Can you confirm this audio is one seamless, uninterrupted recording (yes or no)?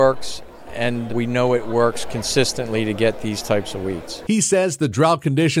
no